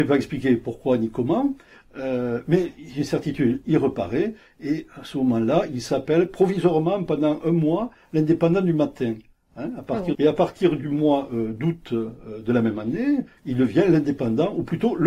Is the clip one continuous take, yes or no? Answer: no